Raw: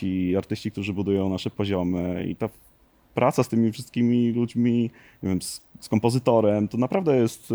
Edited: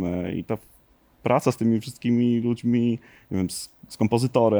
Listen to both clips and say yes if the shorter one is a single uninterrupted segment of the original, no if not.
yes